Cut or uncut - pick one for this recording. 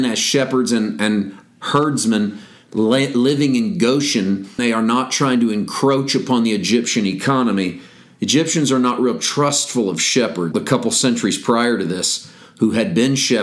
cut